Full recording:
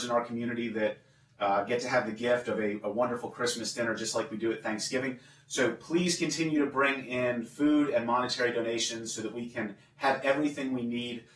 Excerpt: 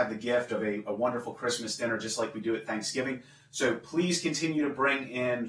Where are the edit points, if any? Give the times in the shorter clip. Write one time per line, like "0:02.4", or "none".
none